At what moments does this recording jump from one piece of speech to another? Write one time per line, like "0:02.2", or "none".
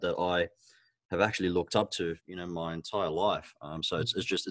0:02.2